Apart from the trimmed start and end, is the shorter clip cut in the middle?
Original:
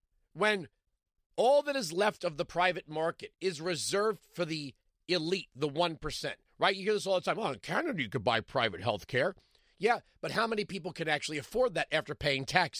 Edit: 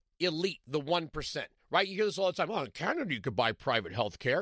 no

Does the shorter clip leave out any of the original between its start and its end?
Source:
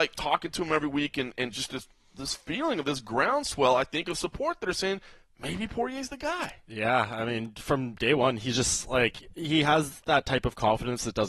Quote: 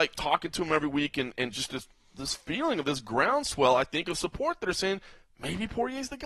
no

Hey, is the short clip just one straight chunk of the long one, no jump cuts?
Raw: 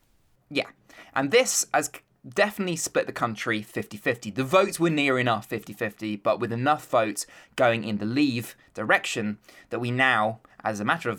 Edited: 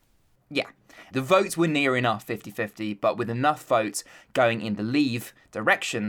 no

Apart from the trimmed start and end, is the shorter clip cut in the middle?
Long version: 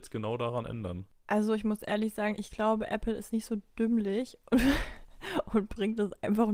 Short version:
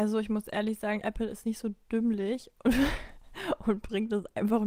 yes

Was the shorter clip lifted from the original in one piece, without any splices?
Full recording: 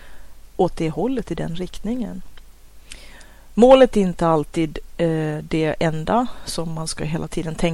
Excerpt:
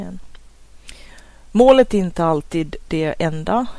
no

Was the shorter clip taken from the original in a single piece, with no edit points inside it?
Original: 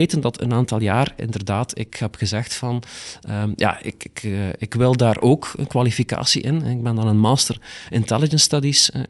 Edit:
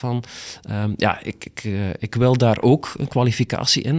yes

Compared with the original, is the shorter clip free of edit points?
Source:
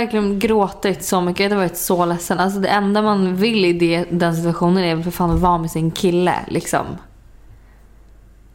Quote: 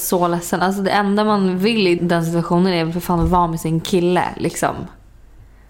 no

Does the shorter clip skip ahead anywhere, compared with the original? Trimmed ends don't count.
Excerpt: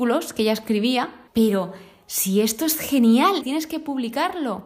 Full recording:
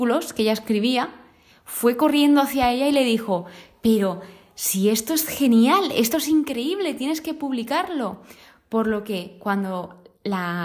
yes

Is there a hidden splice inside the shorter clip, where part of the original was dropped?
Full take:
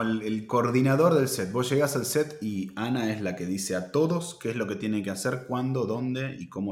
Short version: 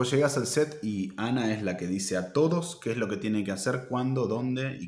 no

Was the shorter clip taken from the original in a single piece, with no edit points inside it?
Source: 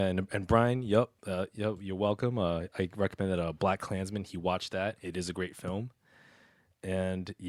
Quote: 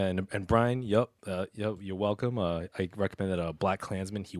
yes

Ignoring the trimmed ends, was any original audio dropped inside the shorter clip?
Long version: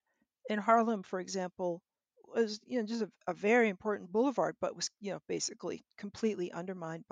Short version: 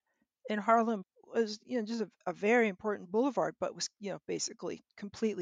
yes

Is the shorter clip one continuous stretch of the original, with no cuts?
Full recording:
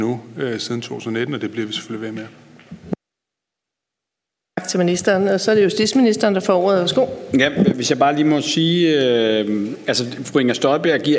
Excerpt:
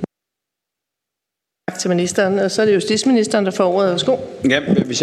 yes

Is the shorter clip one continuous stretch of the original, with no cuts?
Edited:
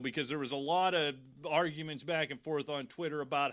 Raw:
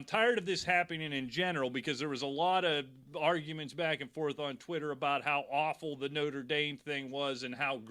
yes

